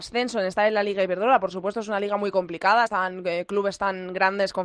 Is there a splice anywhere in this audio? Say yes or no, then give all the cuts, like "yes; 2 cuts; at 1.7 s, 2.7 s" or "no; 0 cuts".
no; 0 cuts